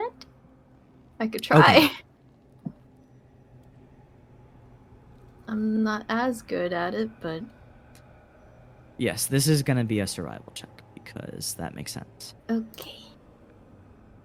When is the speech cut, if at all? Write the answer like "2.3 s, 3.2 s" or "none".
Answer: 12.4 s